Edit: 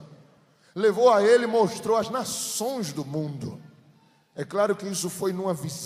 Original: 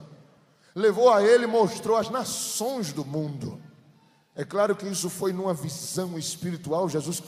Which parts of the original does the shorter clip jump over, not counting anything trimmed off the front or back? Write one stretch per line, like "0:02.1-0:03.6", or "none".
none